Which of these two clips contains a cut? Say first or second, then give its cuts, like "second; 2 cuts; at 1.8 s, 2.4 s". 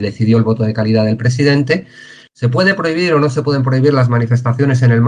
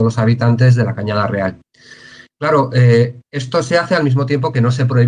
first; 1 cut; at 2.2 s